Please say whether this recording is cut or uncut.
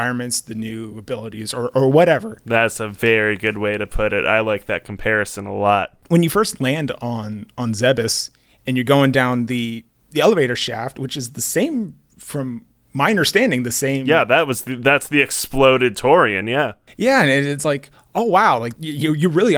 uncut